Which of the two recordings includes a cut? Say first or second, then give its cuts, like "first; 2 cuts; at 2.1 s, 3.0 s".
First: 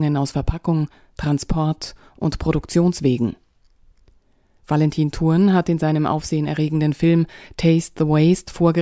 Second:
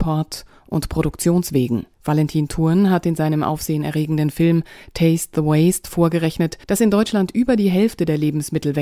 second; 2 cuts; at 1.9 s, 6.6 s